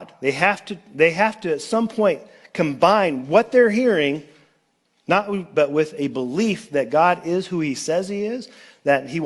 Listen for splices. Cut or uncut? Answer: cut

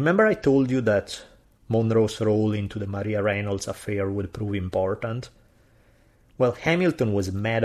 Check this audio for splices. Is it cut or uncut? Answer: uncut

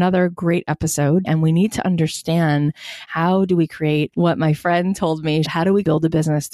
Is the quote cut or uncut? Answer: cut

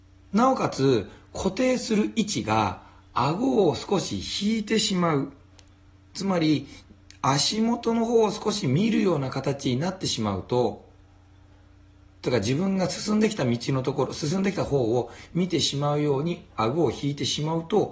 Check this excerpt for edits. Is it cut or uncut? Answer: uncut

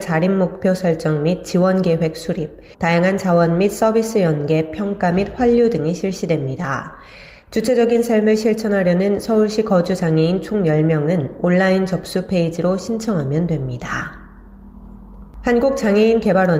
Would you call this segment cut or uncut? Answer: cut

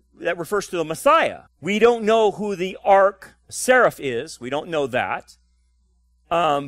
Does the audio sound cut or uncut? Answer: cut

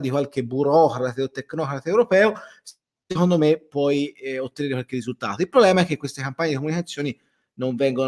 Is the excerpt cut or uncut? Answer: uncut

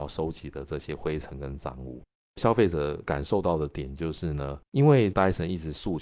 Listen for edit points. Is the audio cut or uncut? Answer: cut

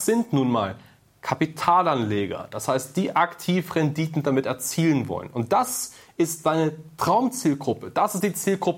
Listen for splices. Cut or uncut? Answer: uncut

